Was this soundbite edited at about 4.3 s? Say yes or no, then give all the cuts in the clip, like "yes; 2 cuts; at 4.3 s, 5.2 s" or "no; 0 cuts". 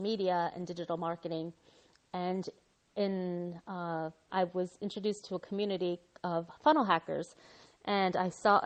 yes; 1 cut; at 4.3 s